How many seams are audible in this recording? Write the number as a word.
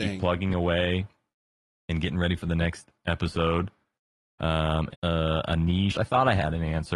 two